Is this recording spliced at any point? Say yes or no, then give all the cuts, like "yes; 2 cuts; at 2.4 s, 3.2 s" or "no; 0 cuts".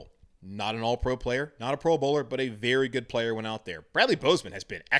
no; 0 cuts